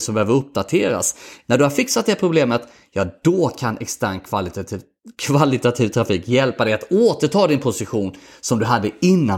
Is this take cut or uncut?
cut